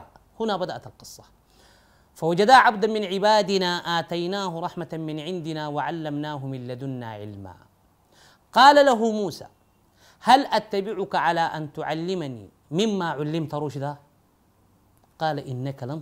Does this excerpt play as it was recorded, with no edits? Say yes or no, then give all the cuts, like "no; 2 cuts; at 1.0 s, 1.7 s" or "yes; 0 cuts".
yes; 0 cuts